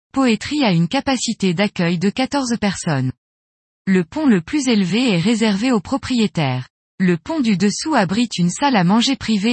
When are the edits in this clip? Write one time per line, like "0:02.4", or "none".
0:03.7